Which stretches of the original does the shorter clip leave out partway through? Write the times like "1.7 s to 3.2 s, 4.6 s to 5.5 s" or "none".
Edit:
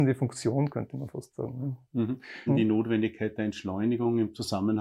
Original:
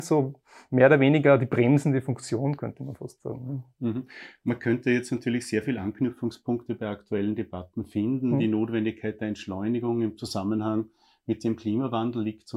4.3 s to 8.3 s